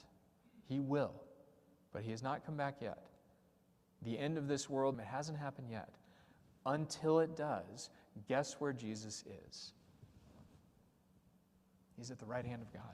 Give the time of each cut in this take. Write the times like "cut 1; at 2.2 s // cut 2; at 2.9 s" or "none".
cut 1; at 4.9 s